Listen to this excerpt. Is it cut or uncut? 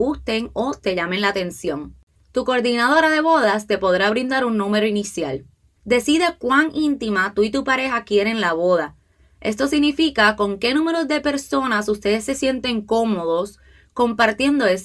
cut